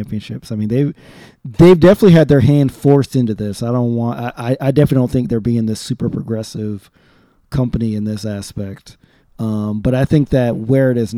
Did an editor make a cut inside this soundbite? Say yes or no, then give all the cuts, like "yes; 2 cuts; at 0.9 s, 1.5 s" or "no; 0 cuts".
no; 0 cuts